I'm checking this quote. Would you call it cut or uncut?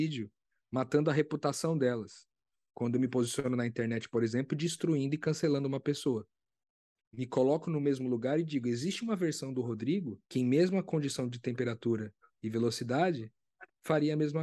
cut